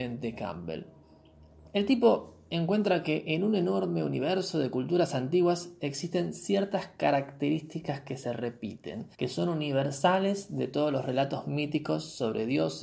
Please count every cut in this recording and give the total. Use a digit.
1